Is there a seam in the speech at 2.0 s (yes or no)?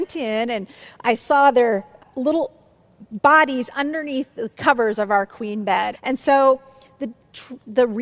yes